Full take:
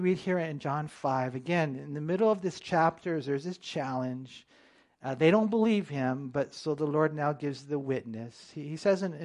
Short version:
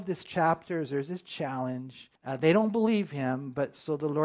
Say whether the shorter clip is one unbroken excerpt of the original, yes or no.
no